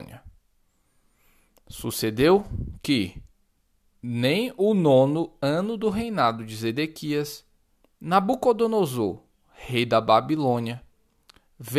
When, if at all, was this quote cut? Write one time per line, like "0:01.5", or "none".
0:07.8